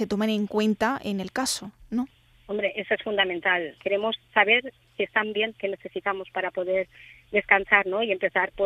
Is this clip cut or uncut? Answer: cut